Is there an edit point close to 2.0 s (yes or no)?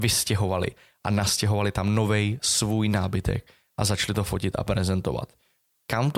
no